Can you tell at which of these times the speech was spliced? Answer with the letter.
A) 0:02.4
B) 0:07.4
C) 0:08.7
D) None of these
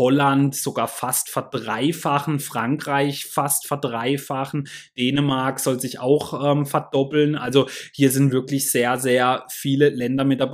D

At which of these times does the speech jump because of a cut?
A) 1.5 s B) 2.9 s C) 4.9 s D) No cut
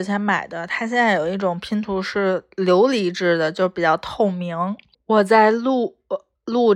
C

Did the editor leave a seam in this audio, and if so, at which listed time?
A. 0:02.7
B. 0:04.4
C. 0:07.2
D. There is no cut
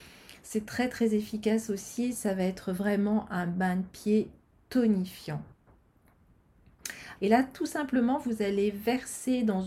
C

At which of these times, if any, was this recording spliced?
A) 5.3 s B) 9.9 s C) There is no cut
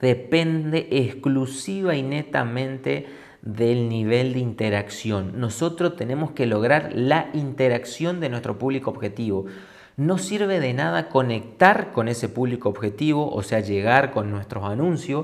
C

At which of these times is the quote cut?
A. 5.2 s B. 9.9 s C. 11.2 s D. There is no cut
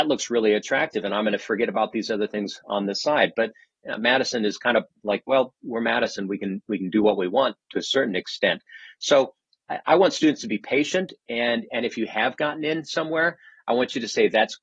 D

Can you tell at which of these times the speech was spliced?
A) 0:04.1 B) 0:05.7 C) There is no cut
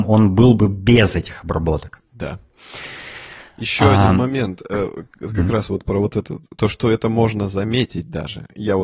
C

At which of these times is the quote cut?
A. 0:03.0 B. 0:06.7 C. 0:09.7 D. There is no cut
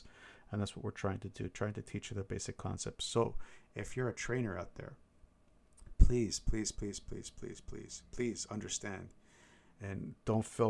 D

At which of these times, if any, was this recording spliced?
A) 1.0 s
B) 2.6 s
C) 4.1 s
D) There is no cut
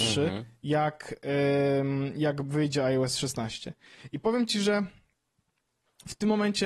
D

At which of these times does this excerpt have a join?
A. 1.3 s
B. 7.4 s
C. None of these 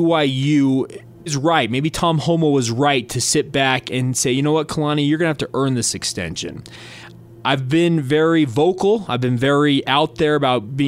A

